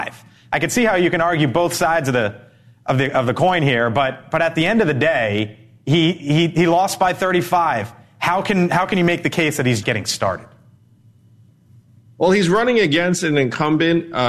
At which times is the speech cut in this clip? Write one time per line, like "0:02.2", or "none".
0:09.8